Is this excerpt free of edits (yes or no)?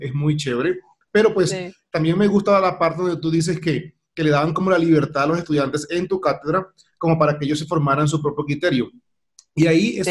yes